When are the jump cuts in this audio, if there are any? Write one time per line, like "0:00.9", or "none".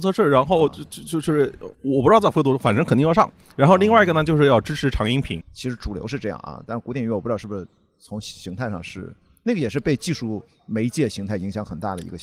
0:01.7
0:05.4